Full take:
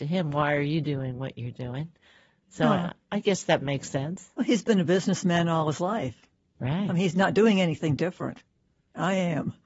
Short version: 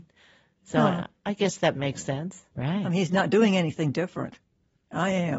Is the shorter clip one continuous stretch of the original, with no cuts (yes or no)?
no